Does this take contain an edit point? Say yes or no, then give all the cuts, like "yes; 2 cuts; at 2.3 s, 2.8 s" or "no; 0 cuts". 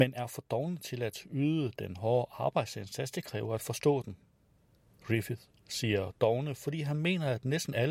no; 0 cuts